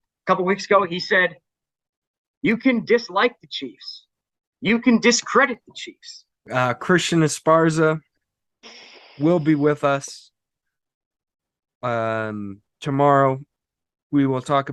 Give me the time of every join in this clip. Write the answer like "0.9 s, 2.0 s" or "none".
6.3 s, 12.7 s